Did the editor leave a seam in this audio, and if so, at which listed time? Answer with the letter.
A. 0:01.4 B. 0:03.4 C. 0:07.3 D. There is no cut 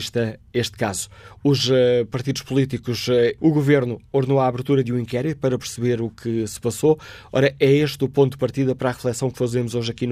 B